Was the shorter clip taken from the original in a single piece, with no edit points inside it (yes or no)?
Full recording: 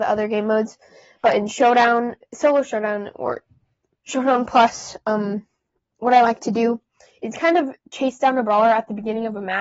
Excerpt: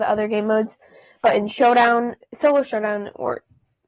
yes